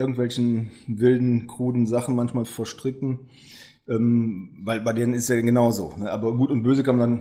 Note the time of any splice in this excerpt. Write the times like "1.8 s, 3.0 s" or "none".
2.4 s